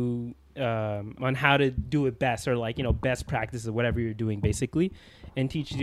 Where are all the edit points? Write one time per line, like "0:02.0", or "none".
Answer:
0:01.2